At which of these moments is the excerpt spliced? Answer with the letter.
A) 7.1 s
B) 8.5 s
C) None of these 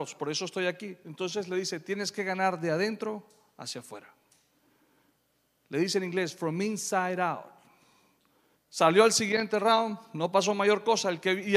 B